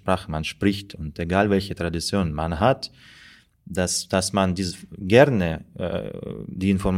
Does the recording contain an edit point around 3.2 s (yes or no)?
no